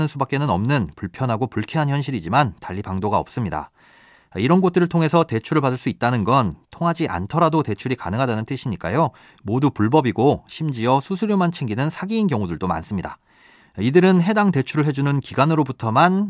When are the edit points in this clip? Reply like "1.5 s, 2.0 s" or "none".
9.3 s, 13.6 s